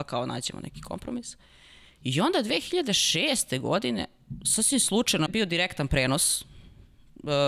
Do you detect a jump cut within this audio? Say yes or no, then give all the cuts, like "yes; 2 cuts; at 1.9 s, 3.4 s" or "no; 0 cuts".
yes; 1 cut; at 5.3 s